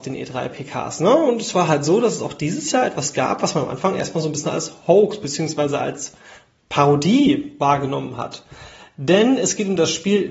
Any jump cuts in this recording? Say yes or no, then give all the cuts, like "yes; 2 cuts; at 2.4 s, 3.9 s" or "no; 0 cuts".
no; 0 cuts